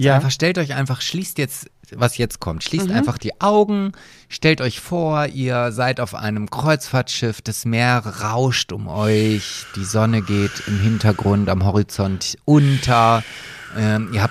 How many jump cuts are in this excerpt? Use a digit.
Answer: 0